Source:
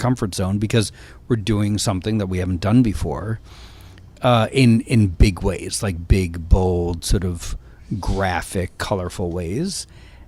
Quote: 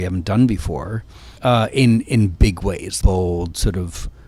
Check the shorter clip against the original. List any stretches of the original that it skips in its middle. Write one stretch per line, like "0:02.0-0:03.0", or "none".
0:03.7-0:04.2
0:05.8-0:06.5

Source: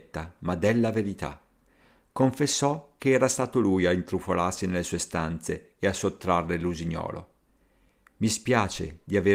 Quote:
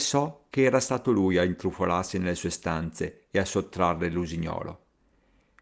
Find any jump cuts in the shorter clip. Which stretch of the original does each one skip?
none

